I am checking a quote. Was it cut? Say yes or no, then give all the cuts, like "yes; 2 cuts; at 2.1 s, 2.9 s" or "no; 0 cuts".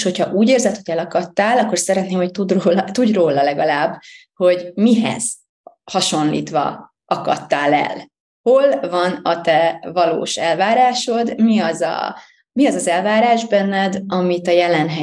no; 0 cuts